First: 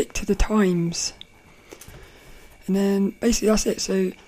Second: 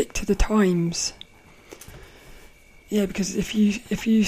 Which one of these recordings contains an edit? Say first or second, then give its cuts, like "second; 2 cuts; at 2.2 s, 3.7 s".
first; 1 cut; at 2.5 s